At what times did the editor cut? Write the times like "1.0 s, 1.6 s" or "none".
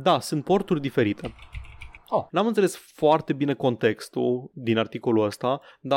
2.3 s

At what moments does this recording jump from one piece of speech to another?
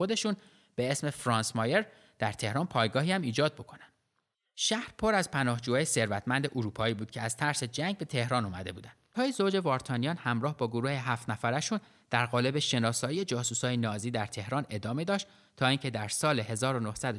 4.4 s, 9.1 s

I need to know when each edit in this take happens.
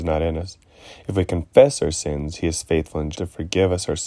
3.1 s

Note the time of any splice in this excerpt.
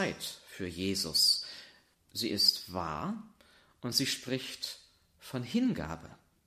1.9 s

